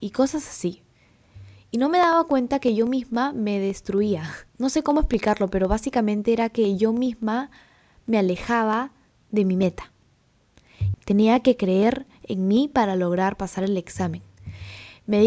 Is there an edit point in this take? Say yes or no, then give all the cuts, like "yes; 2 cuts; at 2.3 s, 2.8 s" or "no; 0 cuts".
yes; 2 cuts; at 4.5 s, 10.9 s